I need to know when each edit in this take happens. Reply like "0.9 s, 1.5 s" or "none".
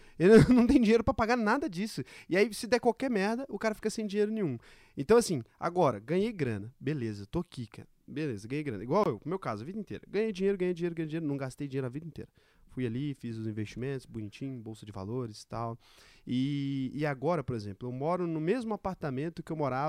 none